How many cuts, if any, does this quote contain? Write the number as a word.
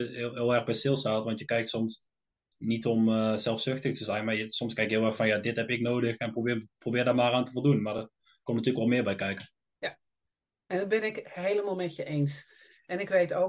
zero